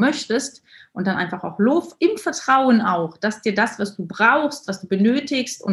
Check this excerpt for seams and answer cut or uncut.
cut